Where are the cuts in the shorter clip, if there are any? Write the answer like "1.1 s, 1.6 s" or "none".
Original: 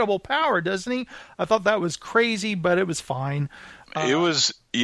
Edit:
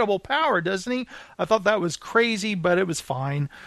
none